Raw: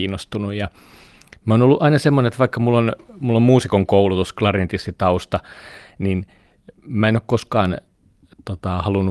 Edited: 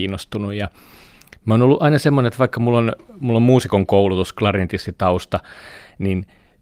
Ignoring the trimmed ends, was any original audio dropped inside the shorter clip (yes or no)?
no